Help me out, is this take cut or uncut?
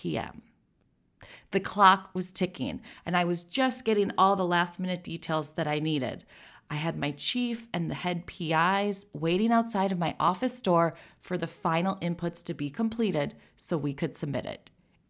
uncut